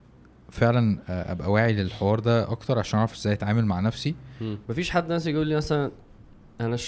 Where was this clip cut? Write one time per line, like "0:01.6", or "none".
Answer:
0:04.6